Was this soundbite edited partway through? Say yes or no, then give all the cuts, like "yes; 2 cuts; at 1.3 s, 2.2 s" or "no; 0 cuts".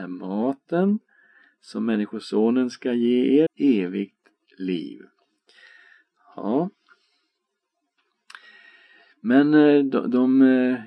yes; 1 cut; at 3.5 s